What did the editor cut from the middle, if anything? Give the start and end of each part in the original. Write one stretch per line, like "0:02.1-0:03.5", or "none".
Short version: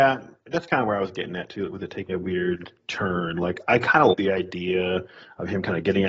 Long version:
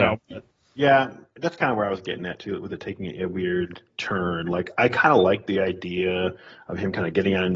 0:03.0-0:03.2
0:05.2-0:05.4